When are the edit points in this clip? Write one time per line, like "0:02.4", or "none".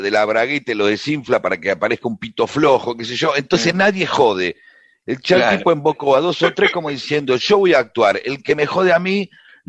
none